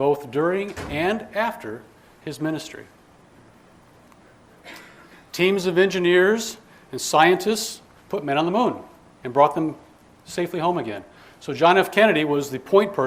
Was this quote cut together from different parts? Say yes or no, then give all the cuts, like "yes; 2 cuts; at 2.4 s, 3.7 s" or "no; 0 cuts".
no; 0 cuts